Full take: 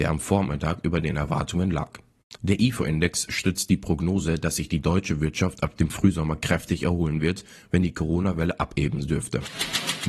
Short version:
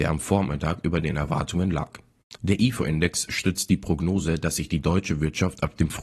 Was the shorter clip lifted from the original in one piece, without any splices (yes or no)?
yes